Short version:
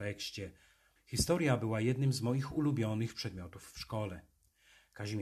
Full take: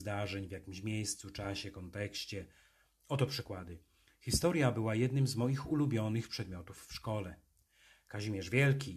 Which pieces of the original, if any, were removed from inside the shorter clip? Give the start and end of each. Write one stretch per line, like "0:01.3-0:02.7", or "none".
0:02.9-0:04.1